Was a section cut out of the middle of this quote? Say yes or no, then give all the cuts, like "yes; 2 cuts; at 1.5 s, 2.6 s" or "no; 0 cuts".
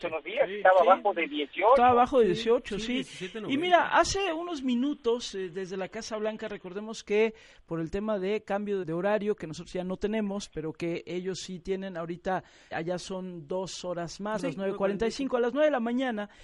yes; 3 cuts; at 8.8 s, 12.7 s, 14.4 s